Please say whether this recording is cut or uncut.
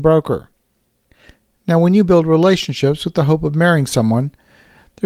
uncut